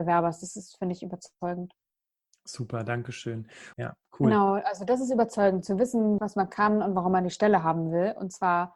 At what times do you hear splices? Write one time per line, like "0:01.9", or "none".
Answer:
0:03.7
0:06.2